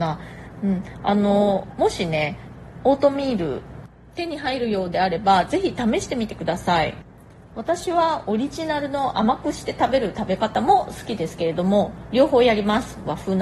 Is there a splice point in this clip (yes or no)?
no